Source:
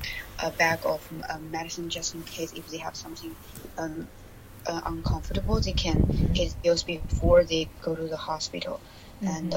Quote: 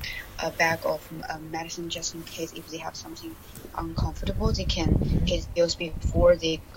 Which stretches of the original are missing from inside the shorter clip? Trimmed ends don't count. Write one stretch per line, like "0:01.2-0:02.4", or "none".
0:03.7-0:04.8